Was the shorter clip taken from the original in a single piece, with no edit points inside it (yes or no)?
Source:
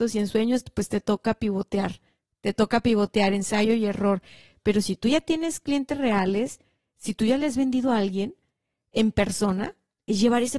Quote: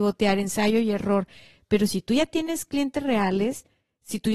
yes